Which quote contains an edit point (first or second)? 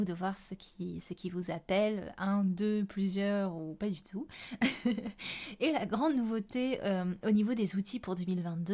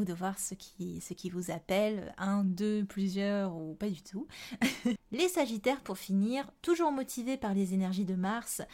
second